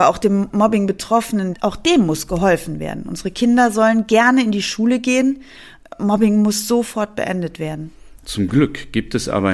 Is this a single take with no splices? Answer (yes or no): no